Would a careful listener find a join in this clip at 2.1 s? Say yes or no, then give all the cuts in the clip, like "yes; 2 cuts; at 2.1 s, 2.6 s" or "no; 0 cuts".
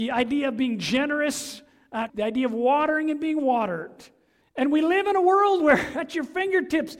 yes; 2 cuts; at 2.1 s, 4.4 s